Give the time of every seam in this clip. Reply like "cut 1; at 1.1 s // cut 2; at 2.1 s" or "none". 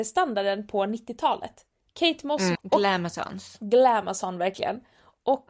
cut 1; at 2.5 s